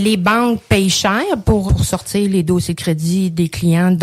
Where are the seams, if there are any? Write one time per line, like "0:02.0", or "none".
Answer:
0:01.7